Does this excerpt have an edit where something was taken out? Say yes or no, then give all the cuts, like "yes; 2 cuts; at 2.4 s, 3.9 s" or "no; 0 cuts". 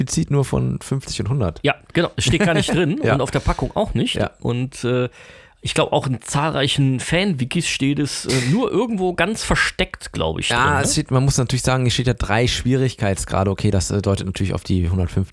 no; 0 cuts